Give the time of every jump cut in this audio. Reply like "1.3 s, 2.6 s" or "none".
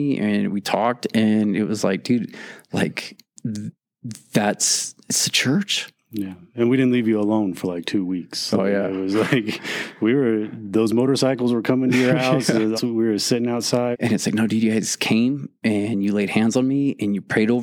12.8 s, 13.9 s